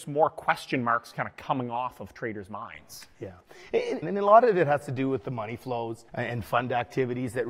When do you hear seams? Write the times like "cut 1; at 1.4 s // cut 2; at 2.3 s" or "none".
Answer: cut 1; at 4.0 s // cut 2; at 6.1 s

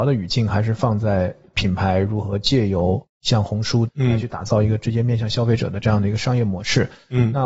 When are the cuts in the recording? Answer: cut 1; at 3.9 s

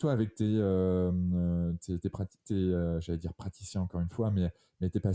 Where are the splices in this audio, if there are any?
none

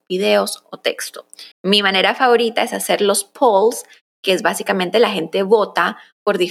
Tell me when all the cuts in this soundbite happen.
cut 1; at 1.5 s

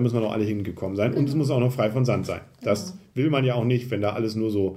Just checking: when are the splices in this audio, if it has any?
none

